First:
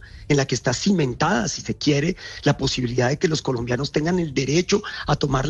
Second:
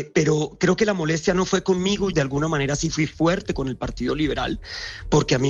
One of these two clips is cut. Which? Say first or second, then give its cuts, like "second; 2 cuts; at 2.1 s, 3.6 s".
second; 1 cut; at 2.1 s